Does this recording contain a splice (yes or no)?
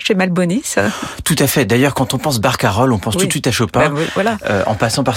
no